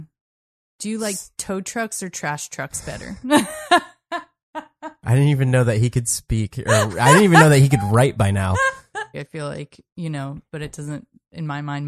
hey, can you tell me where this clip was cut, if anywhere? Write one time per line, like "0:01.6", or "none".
0:09.1
0:10.5